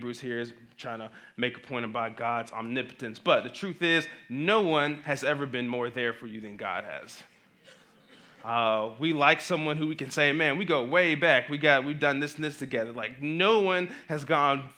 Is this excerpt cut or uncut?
uncut